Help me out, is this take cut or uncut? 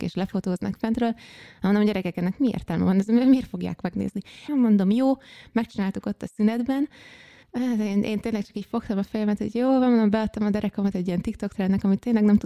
cut